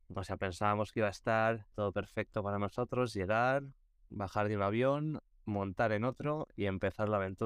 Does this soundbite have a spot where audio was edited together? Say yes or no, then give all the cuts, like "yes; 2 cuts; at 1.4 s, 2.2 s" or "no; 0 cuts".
yes; 1 cut; at 1.7 s